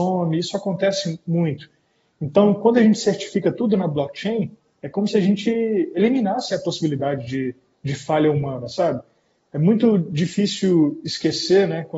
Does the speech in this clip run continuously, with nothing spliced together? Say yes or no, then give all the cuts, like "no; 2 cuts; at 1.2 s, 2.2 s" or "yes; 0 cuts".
yes; 0 cuts